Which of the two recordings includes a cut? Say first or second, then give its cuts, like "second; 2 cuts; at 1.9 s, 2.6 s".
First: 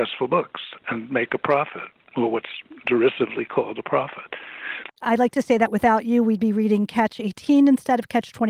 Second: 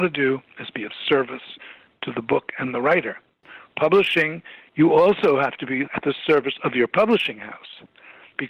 first; 1 cut; at 4.9 s